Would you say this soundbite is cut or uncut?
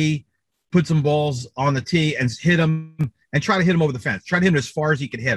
uncut